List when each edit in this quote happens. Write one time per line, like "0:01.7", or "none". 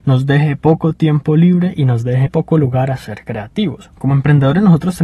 0:02.3
0:04.0